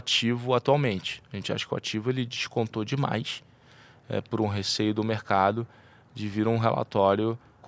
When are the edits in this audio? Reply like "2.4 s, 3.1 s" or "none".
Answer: none